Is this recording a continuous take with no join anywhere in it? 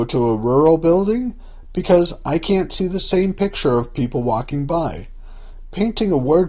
yes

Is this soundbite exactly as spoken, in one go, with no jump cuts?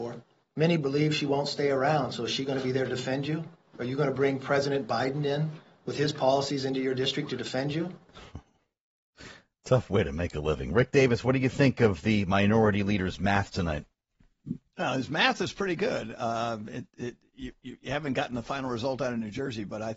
yes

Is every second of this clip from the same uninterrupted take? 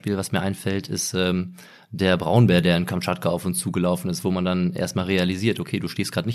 yes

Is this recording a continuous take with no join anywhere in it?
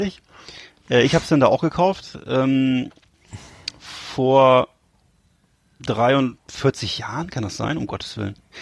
yes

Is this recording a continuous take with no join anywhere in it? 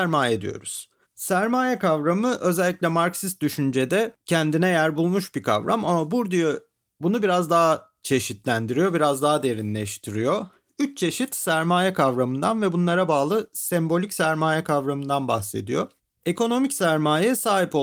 yes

